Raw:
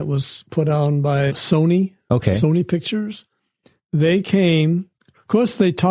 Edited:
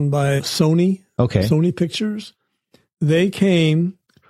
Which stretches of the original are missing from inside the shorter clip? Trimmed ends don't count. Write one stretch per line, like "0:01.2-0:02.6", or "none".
none